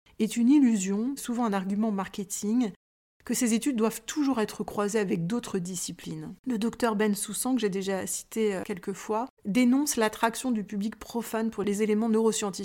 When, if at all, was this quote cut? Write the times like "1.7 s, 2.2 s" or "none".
1.2 s, 6.4 s, 9.4 s

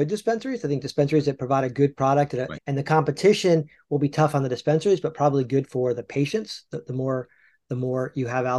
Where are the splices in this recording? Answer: 2.5 s

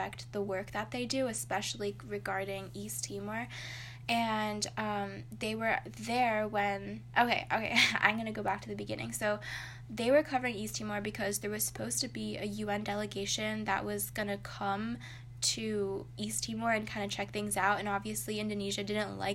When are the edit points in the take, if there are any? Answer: none

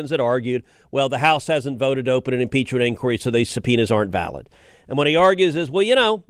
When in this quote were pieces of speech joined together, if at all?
none

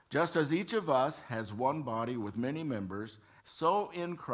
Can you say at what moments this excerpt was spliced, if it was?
3.4 s

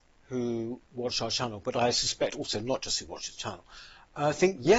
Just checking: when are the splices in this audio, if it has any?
none

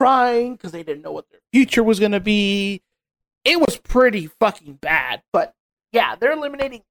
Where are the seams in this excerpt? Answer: none

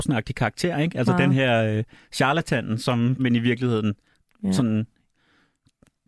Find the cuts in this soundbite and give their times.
3.2 s

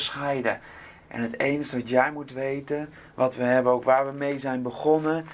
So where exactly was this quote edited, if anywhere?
1.0 s

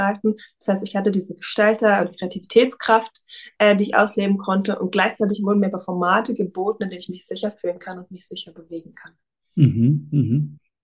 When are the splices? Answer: none

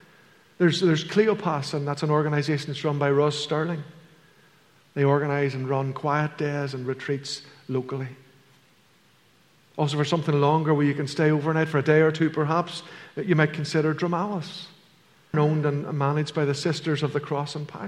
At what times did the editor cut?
15.3 s

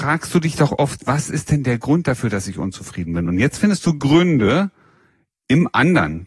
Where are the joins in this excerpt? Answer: none

